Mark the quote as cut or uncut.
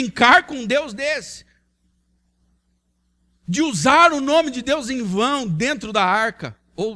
uncut